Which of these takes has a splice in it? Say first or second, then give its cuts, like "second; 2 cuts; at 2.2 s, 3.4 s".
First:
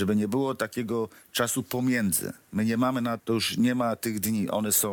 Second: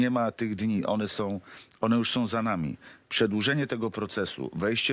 first; 1 cut; at 3.2 s